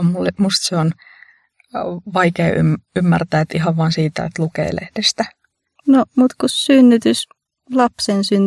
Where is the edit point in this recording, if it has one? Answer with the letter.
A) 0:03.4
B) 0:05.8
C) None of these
B